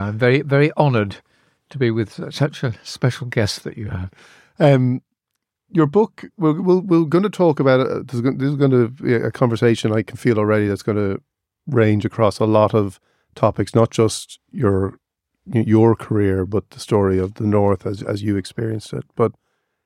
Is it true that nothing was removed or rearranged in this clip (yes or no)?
yes